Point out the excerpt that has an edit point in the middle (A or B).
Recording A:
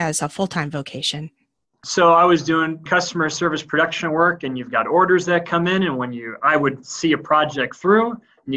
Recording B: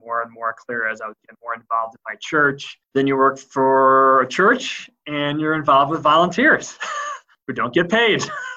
B